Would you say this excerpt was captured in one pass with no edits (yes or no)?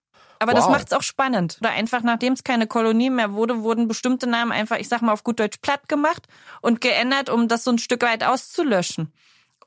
no